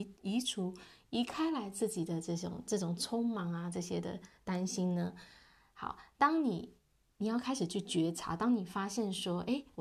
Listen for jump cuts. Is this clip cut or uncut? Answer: uncut